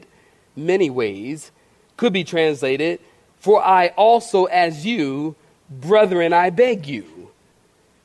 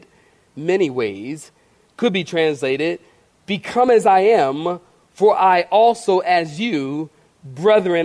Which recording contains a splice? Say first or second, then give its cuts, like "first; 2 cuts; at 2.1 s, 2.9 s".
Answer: first; 1 cut; at 3.3 s